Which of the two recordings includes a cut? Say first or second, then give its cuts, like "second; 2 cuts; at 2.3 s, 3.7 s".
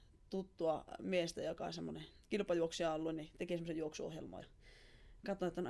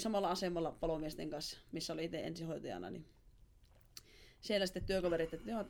first; 1 cut; at 4.4 s